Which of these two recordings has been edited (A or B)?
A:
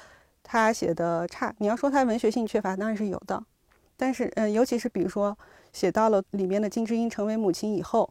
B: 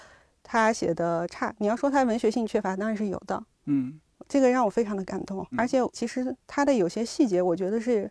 B